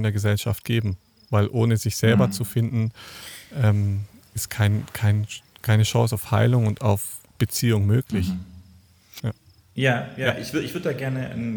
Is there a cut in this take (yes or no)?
yes